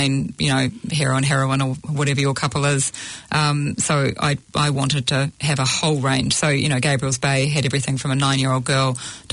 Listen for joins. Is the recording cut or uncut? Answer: uncut